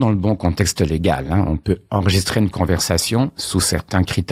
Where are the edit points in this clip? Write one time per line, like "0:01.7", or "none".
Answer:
none